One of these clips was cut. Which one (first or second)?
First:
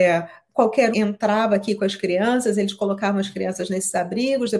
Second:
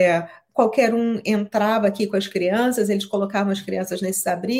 first